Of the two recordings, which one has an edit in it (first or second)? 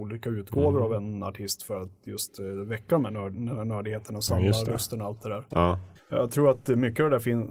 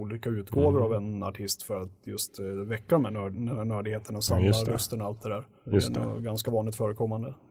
first